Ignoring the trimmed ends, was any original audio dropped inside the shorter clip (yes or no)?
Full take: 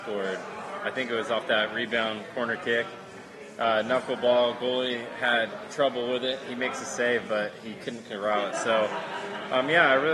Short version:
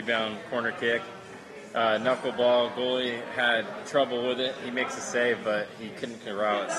no